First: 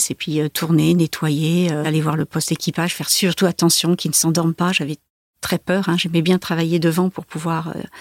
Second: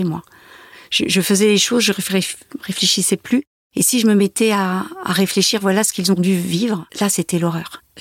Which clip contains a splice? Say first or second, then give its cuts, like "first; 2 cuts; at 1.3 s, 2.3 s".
second; 1 cut; at 6.9 s